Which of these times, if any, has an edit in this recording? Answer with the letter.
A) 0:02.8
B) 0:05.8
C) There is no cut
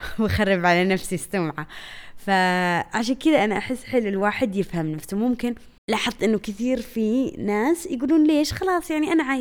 B